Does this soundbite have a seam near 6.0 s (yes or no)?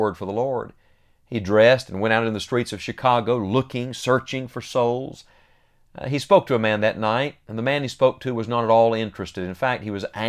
no